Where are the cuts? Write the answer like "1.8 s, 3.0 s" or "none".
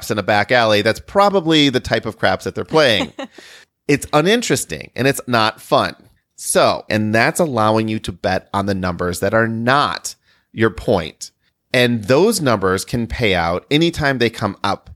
6.9 s